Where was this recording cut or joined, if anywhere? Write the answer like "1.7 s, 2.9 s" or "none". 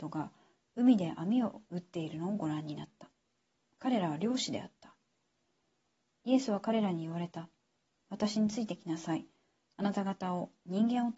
none